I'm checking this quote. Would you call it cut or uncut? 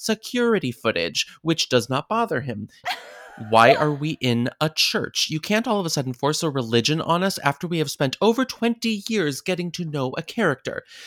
cut